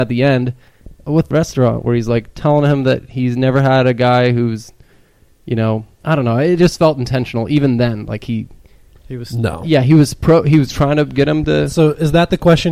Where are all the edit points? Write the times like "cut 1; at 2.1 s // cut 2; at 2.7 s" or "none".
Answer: cut 1; at 1.3 s

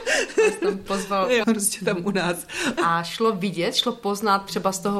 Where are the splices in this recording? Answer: cut 1; at 1.4 s // cut 2; at 2.8 s

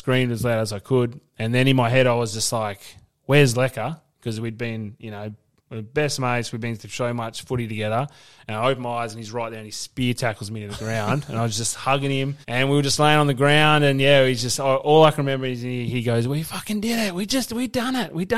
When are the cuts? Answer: cut 1; at 12.4 s

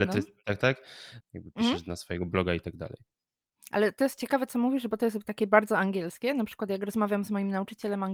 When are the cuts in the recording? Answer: cut 1; at 1.2 s

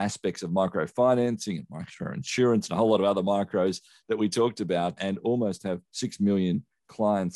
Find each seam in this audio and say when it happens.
cut 1; at 5.0 s

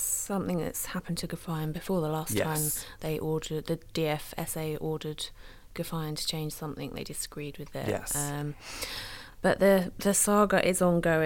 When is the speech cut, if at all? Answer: none

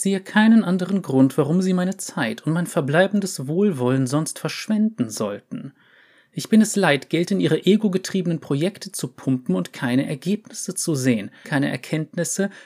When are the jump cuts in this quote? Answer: cut 1; at 11.4 s

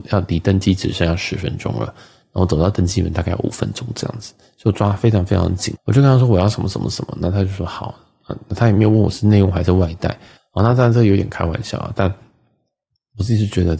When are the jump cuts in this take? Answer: cut 1; at 5.8 s // cut 2; at 10.4 s

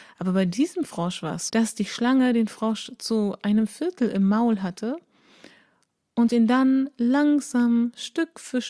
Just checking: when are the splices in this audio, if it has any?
cut 1; at 1.5 s

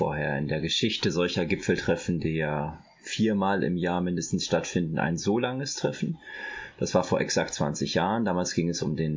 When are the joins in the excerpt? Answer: none

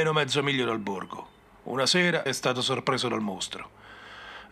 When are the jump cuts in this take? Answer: cut 1; at 2.3 s

